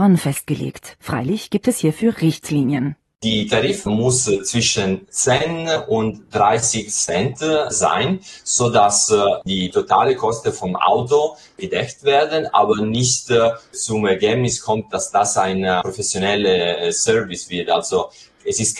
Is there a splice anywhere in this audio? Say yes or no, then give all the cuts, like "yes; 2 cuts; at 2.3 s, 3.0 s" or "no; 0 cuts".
yes; 1 cut; at 1.0 s